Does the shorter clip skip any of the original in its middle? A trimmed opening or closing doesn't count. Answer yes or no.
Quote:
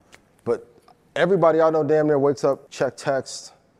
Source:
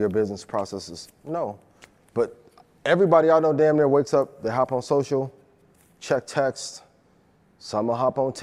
yes